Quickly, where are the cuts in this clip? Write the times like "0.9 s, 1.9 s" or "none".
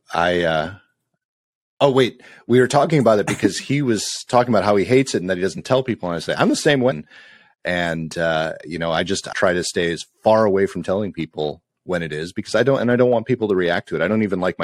6.9 s, 9.3 s